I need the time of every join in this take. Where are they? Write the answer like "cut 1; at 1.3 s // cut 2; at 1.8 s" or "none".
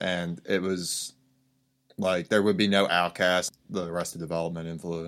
cut 1; at 3.5 s